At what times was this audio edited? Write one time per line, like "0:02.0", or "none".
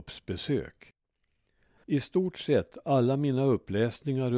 0:01.8